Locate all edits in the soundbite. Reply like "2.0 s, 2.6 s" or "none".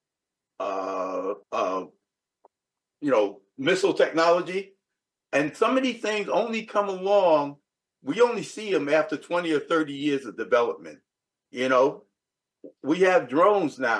1.4 s